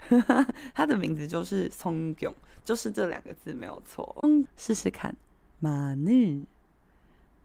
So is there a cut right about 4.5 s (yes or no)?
yes